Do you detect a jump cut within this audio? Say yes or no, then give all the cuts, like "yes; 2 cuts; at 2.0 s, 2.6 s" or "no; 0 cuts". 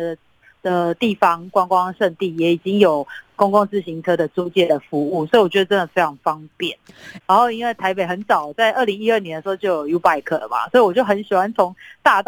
yes; 1 cut; at 7.2 s